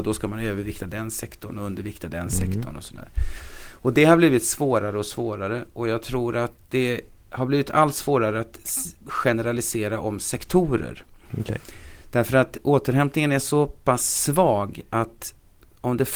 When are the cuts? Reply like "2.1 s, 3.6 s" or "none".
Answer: none

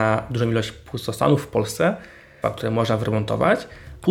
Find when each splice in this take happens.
2.4 s

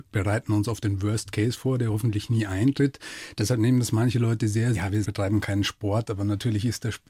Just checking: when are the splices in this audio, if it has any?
4.7 s

